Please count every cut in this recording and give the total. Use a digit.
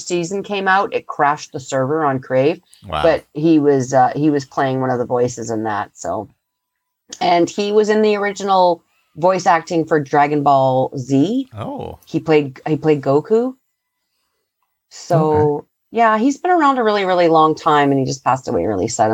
0